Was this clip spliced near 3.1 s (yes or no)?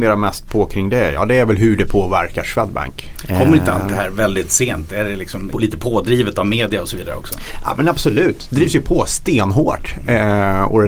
yes